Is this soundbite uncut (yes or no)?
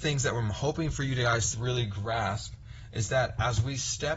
no